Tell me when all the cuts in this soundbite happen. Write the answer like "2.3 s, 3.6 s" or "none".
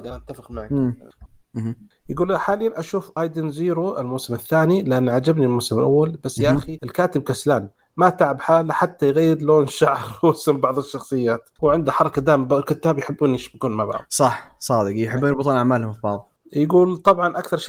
1.3 s, 11.6 s